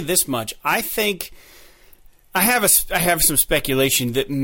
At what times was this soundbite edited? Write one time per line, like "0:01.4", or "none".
none

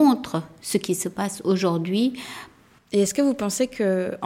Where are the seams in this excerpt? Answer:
0:02.8

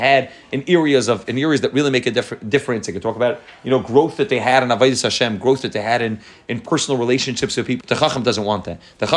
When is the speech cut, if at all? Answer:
0:07.8

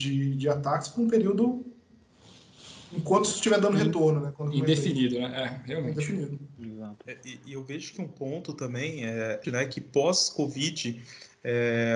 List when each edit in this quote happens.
0:09.4

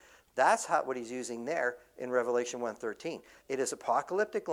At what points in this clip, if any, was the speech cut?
0:03.4

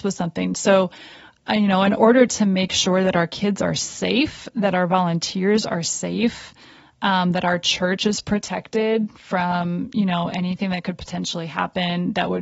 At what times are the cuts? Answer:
none

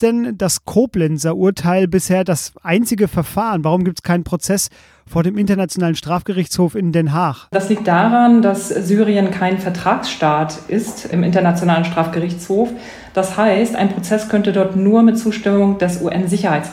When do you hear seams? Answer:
0:11.1

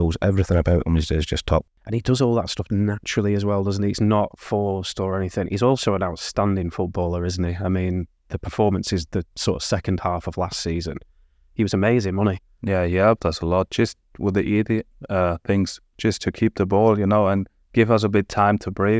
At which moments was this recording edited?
none

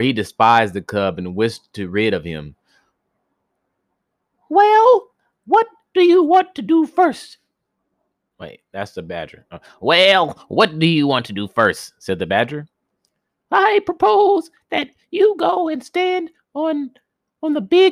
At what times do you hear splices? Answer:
none

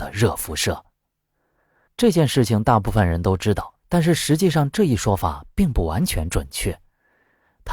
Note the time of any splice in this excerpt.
0:01.9
0:03.8

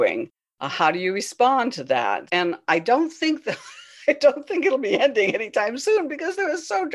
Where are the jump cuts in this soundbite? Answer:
0:02.3

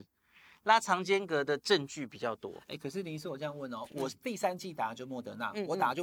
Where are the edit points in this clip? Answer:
none

